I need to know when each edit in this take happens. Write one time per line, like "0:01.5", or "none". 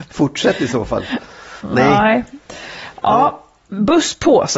none